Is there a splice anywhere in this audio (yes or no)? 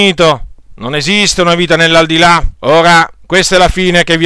yes